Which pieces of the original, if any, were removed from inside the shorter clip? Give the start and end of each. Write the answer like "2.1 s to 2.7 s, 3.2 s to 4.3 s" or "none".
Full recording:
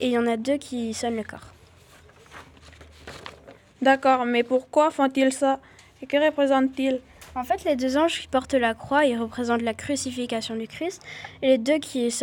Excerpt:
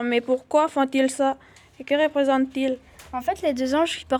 none